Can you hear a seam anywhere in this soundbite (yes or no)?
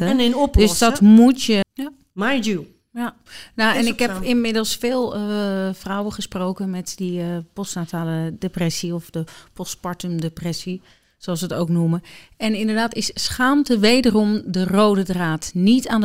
yes